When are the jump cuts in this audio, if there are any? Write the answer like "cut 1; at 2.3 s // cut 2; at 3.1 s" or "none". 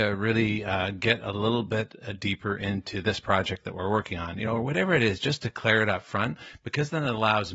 none